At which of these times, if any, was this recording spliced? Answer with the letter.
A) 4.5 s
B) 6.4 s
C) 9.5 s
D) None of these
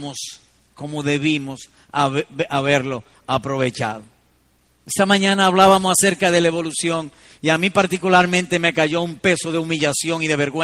D